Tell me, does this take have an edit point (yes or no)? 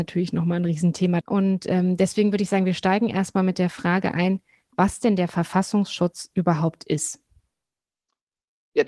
yes